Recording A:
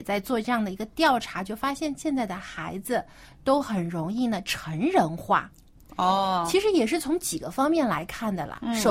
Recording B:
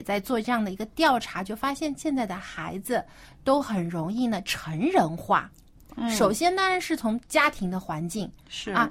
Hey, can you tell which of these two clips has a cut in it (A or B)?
B